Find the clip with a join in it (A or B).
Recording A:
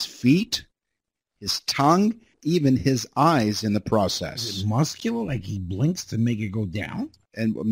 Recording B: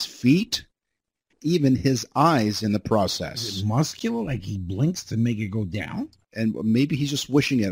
B